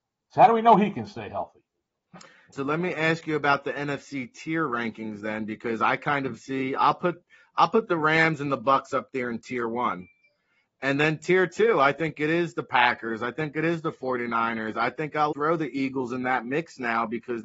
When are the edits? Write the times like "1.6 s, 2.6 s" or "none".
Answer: 2.5 s, 15.3 s